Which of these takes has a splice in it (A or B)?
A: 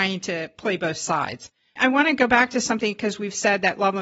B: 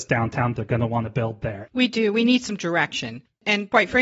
B